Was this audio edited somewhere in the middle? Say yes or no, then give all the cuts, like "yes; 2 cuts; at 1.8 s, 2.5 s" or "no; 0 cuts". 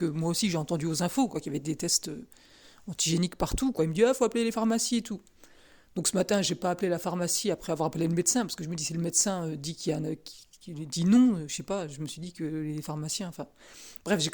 no; 0 cuts